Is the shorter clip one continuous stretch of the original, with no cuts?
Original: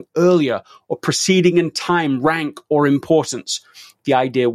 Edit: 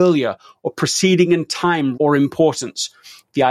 no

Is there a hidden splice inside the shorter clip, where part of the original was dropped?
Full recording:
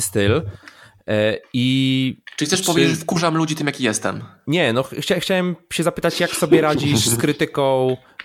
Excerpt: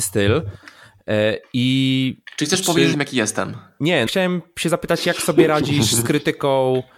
yes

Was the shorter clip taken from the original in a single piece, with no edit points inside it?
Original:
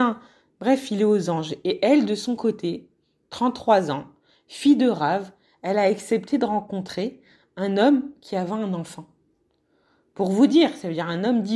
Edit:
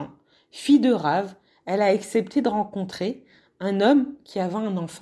yes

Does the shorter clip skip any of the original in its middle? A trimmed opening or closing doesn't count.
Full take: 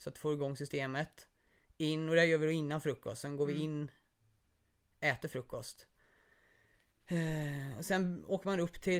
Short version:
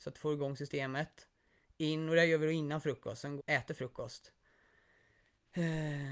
yes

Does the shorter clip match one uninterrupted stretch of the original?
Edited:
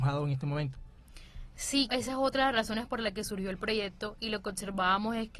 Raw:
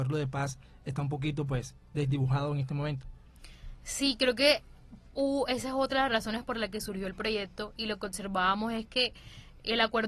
no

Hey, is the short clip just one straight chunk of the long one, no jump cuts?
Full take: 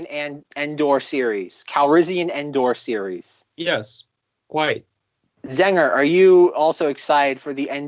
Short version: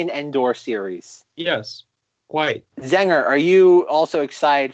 no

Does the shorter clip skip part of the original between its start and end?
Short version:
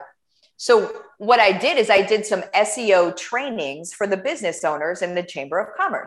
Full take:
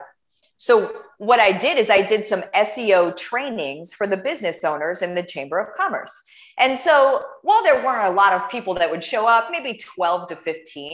no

